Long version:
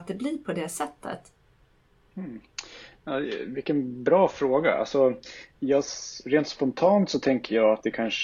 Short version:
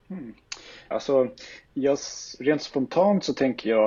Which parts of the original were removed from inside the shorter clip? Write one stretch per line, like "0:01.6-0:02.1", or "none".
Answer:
0:03.0-0:04.8